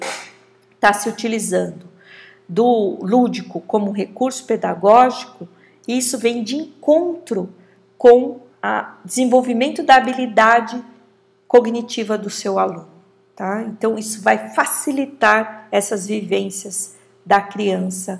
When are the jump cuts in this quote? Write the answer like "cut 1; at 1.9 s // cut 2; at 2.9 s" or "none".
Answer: cut 1; at 8.5 s